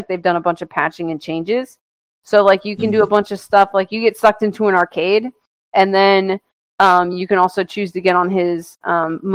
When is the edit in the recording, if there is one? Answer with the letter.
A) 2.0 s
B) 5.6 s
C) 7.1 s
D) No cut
D